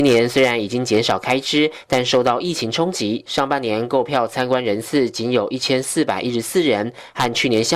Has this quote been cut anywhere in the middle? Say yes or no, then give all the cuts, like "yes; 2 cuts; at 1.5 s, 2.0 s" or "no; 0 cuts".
no; 0 cuts